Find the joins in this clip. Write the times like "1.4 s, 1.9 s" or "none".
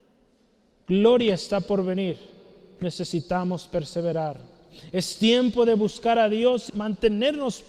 6.7 s